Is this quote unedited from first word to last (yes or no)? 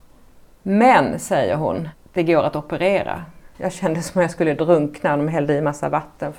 no